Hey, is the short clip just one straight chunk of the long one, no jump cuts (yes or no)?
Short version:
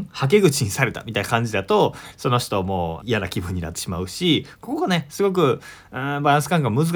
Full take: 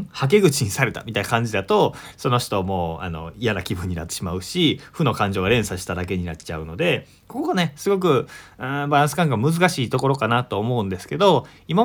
no